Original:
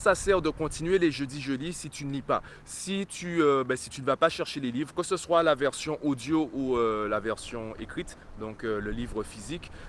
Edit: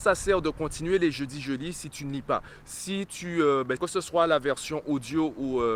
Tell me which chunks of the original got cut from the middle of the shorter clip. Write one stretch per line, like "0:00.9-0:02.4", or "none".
0:03.8-0:04.9